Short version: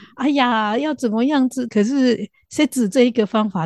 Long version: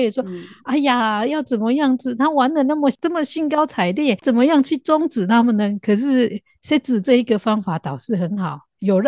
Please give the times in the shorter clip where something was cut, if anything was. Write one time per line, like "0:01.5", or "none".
0:01.7